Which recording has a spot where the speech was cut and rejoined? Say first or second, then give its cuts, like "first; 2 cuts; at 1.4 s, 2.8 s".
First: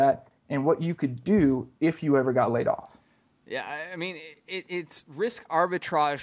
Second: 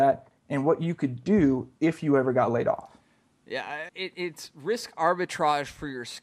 second; 1 cut; at 3.9 s